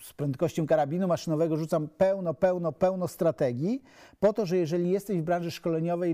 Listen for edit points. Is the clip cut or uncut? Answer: uncut